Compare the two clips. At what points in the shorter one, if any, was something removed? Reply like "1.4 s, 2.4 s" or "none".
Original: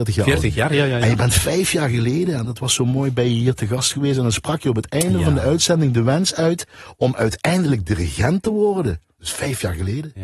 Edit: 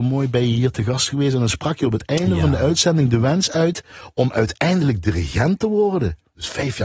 none